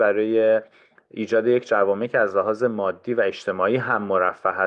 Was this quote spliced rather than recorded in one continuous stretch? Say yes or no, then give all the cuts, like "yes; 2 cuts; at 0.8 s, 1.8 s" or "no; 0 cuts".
no; 0 cuts